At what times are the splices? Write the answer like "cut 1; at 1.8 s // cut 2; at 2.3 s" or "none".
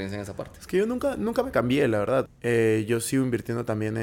cut 1; at 2.3 s